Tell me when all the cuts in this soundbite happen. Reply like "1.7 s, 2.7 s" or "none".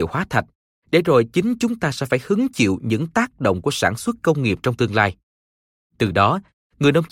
5.8 s